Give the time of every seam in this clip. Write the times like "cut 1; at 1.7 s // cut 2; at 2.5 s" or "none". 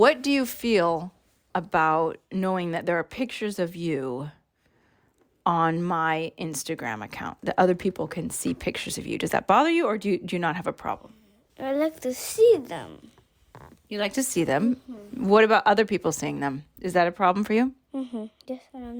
none